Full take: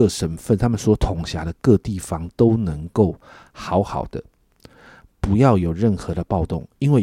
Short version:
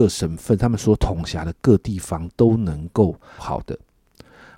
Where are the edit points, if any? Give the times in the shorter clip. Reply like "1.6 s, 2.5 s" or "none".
3.4 s